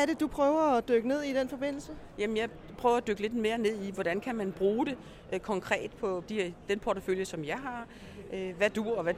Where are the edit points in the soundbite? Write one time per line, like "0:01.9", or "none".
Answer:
0:06.3